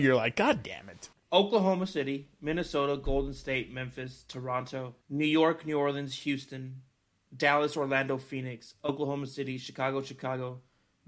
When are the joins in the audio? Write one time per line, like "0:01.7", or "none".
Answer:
0:01.1
0:05.0